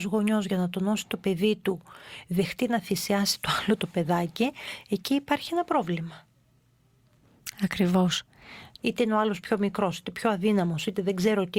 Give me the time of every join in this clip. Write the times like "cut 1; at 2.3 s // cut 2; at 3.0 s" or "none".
cut 1; at 8.8 s